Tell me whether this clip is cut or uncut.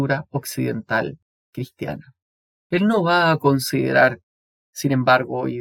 uncut